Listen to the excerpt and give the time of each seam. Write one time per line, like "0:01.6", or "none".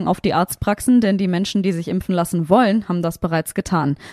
none